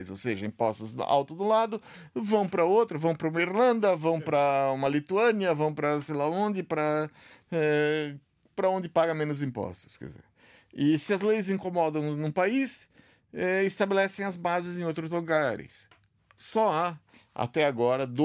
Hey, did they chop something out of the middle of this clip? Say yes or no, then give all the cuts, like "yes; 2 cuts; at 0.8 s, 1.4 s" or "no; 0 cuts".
no; 0 cuts